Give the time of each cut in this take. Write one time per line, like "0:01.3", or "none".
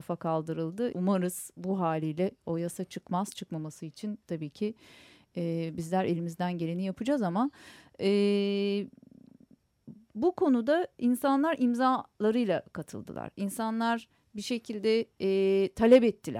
0:00.9